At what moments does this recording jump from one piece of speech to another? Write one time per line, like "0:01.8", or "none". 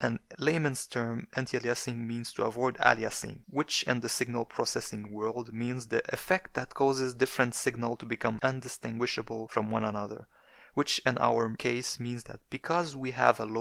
none